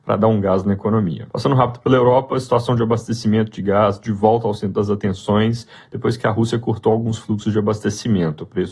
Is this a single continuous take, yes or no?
no